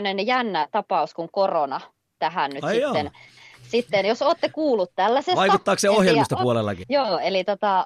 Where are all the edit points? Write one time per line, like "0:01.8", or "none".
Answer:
0:06.8